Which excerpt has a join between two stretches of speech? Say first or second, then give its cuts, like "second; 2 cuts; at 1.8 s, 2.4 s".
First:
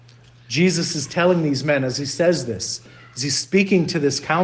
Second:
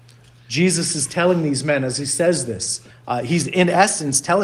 second; 1 cut; at 2.9 s